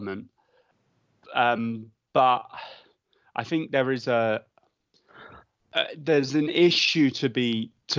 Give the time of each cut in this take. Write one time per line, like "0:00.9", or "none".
none